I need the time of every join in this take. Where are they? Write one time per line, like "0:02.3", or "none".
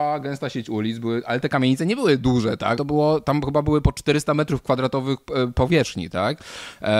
0:02.8